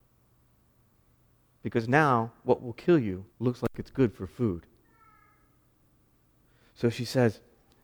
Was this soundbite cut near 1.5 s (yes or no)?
no